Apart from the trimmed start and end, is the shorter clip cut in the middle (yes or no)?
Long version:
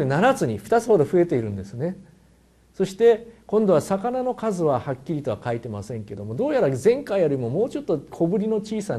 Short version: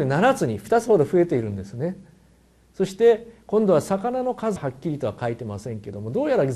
yes